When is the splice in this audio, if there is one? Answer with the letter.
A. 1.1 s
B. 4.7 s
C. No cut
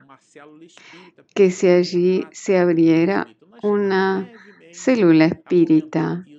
C